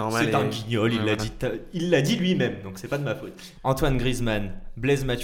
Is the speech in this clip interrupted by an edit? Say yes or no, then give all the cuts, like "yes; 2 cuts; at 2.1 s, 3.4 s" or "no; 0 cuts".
yes; 1 cut; at 3.5 s